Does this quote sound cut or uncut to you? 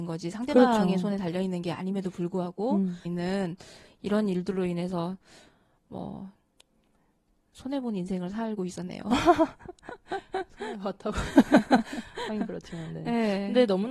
cut